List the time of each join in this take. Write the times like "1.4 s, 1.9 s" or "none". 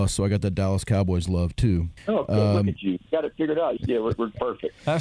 3.8 s